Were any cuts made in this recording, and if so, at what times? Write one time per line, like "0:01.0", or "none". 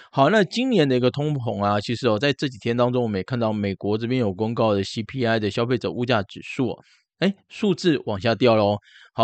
none